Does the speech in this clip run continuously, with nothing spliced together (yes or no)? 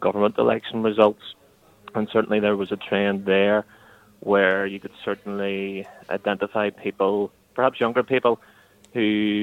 yes